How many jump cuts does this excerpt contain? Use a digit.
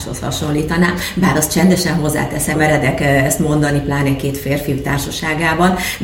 1